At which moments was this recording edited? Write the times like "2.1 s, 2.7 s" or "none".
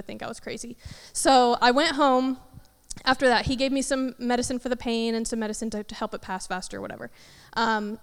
none